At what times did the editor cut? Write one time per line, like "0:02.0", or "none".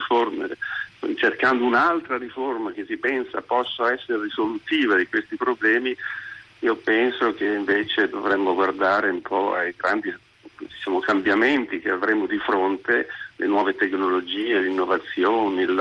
0:10.5